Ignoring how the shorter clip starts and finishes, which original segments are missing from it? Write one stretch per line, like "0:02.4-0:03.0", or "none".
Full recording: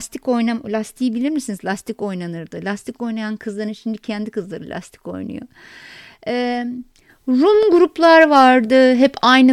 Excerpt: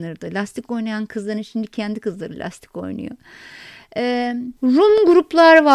0:06.9-0:07.2